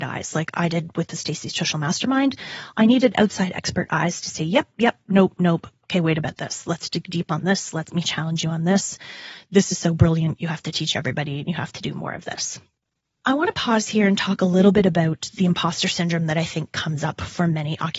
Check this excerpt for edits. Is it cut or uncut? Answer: uncut